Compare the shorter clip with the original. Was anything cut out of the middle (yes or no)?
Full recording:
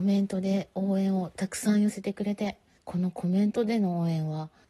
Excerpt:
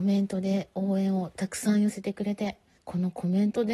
no